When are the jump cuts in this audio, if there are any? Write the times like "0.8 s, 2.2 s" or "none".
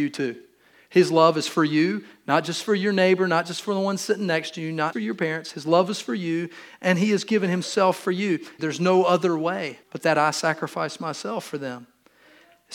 4.9 s, 8.6 s, 9.8 s

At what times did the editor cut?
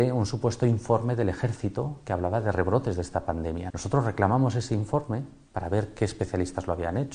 3.7 s

